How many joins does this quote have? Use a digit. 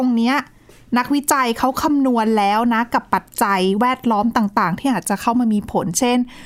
0